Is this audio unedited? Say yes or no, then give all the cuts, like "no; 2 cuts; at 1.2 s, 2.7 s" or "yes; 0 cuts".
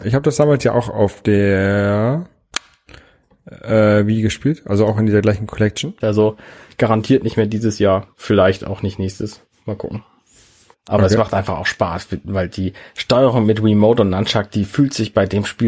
no; 2 cuts; at 6.0 s, 10.7 s